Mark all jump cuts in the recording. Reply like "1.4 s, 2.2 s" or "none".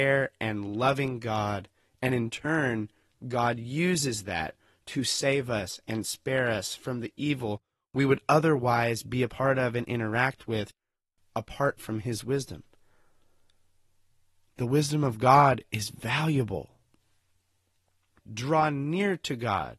18.2 s

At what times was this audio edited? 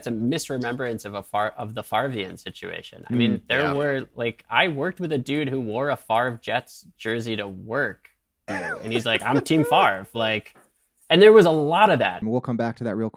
8.5 s, 12.2 s

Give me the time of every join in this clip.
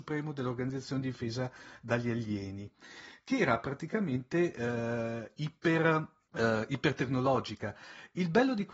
6.3 s

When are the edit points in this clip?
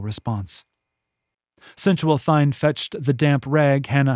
none

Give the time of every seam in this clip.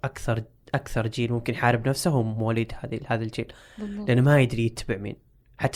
none

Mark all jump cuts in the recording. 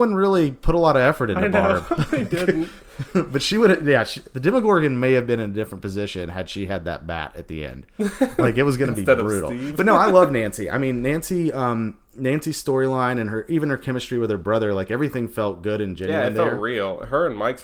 none

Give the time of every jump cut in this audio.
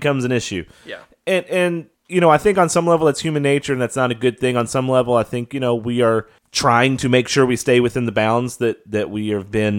none

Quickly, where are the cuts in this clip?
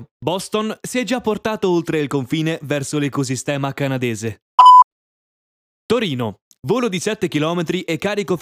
6.6 s

